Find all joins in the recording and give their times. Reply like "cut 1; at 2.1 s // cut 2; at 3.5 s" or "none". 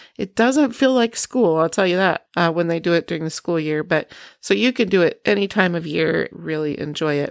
cut 1; at 6.3 s